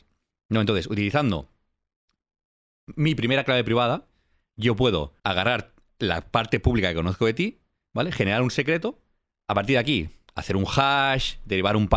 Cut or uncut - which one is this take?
cut